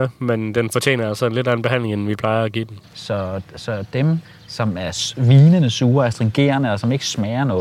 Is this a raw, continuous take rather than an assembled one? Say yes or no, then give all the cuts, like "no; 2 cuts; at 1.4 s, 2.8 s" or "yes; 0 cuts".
no; 2 cuts; at 2.8 s, 4.2 s